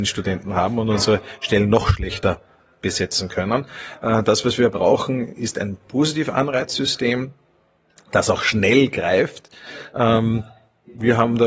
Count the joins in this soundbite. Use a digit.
0